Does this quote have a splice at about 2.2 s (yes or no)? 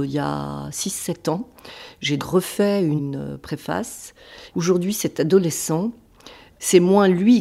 yes